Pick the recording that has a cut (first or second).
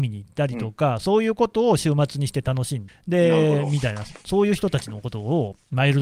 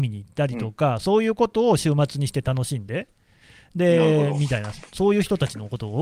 first